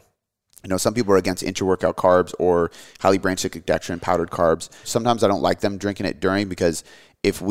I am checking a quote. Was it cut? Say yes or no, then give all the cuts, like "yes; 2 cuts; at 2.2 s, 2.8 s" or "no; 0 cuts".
yes; 1 cut; at 4.8 s